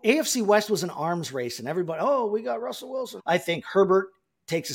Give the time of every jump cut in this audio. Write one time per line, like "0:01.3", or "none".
0:03.2